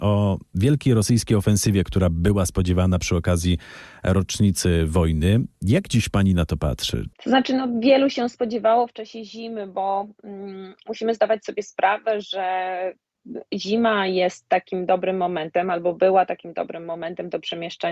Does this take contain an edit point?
yes; 1 cut; at 7.1 s

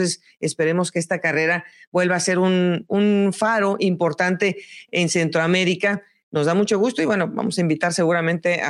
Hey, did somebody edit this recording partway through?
no; 0 cuts

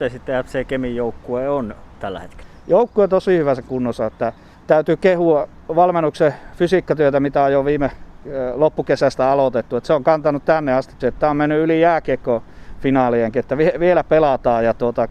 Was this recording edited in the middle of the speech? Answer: yes; 1 cut; at 11.0 s

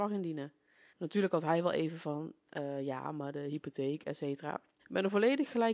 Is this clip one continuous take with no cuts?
no; 1 cut; at 4.8 s

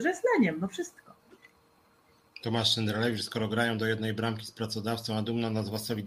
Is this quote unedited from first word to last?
yes; 0 cuts

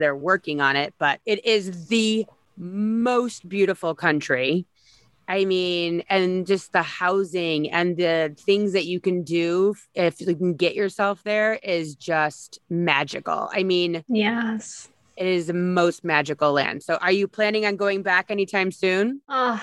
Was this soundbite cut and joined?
no; 0 cuts

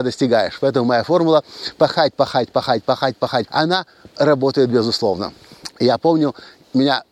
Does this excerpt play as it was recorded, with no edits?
no; 3 cuts; at 2.1 s, 3.5 s, 5.7 s

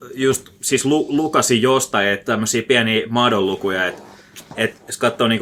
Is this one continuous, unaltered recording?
yes; 0 cuts

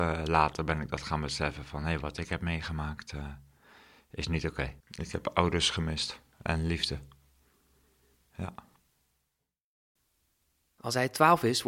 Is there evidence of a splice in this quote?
yes; 1 cut; at 4.8 s

